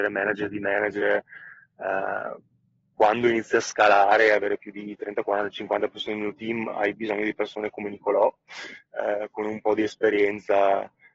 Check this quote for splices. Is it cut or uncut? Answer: uncut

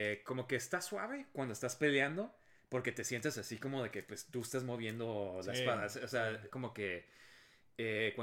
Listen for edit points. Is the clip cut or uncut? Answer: cut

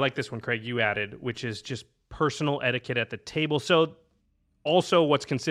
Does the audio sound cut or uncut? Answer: uncut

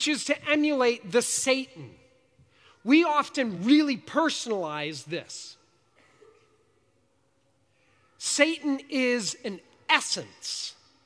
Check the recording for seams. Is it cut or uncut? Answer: uncut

